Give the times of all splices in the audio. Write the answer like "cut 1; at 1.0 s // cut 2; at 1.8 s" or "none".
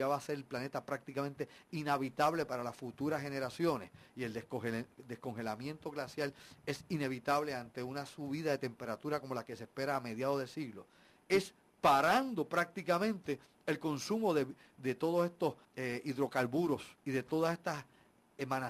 cut 1; at 15.6 s // cut 2; at 17.0 s